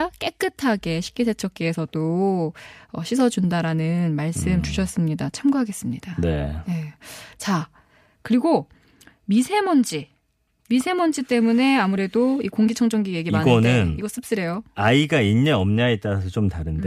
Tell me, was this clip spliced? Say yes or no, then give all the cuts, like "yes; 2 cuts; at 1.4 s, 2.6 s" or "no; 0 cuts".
no; 0 cuts